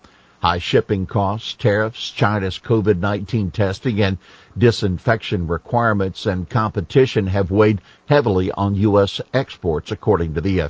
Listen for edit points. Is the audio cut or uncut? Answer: uncut